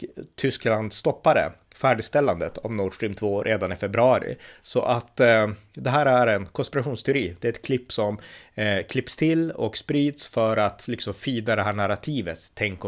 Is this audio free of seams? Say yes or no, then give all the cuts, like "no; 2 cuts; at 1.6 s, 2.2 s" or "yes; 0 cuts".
no; 1 cut; at 4.6 s